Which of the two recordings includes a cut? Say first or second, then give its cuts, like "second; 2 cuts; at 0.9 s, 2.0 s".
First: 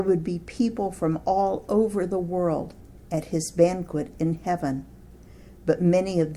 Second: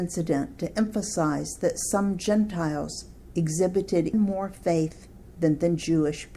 second; 1 cut; at 4.1 s